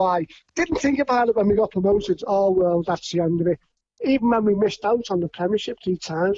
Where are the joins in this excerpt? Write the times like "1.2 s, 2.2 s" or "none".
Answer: none